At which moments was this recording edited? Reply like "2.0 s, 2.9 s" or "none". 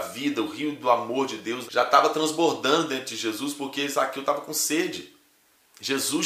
1.7 s